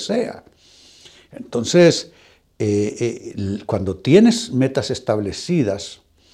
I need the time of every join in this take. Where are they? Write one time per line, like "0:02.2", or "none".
none